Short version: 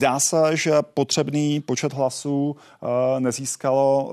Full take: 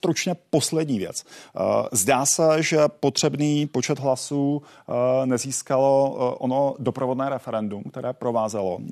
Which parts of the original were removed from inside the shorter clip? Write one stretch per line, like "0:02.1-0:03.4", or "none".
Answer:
none